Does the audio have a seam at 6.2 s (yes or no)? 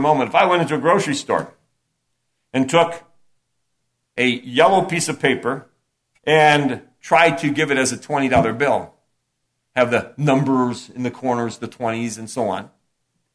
yes